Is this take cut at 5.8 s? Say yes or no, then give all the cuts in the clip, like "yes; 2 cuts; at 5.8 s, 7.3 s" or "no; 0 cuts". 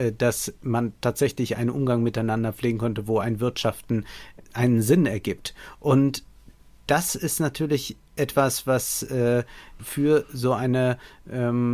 no; 1 cut; at 9.8 s